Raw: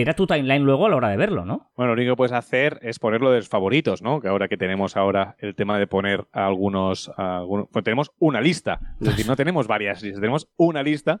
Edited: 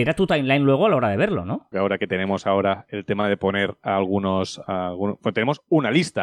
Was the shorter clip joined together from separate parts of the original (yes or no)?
yes